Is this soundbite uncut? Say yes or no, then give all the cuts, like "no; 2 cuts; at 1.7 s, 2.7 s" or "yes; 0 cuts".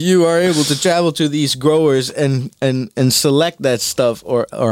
yes; 0 cuts